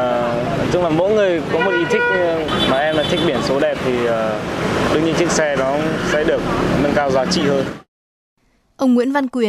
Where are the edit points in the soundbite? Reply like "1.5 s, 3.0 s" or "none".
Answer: none